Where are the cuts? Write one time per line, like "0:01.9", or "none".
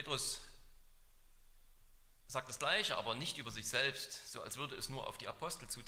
none